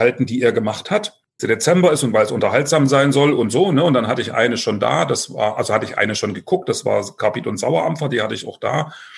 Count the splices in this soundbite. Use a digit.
1